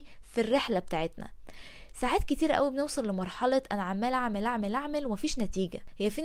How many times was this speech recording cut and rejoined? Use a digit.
0